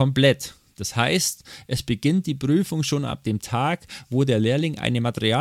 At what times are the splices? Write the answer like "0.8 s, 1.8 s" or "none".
none